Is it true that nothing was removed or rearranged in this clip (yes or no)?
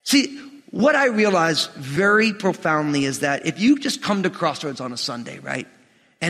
yes